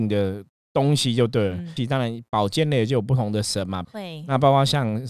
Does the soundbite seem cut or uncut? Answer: cut